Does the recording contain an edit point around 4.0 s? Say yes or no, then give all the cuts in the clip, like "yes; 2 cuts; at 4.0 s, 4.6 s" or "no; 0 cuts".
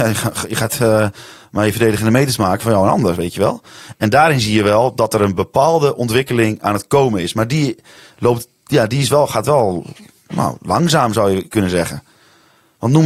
no; 1 cut; at 2.6 s